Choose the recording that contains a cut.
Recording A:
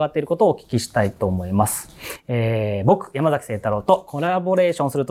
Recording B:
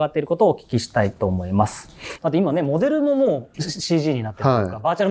B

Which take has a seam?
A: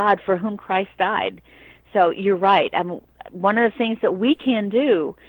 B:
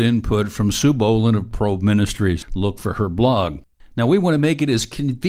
B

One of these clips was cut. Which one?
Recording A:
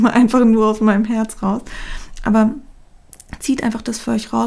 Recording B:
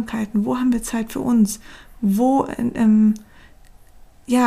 A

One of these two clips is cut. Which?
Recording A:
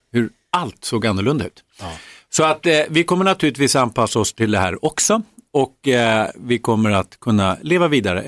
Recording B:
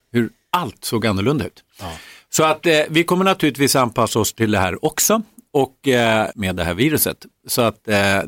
B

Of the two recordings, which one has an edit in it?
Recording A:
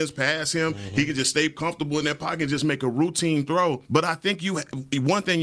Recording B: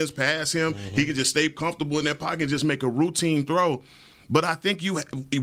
A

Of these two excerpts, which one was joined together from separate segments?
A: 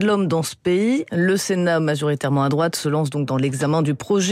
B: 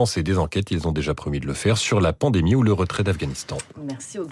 A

